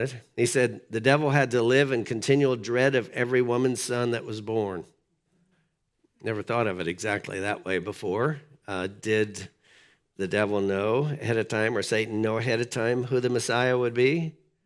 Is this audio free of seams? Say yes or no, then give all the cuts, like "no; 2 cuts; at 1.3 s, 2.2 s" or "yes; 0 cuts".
yes; 0 cuts